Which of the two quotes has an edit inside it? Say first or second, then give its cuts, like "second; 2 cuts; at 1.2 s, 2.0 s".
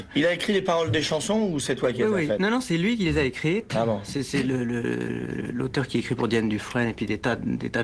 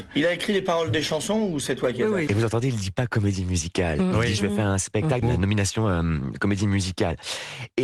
second; 2 cuts; at 2.3 s, 5.2 s